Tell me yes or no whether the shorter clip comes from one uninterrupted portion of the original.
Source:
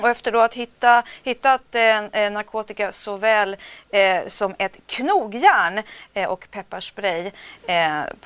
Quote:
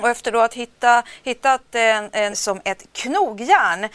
no